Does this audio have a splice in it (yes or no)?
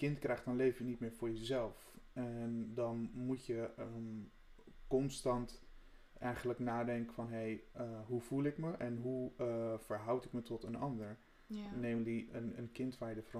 yes